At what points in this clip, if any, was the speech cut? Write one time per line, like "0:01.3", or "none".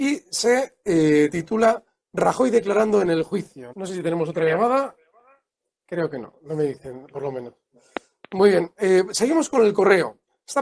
0:03.7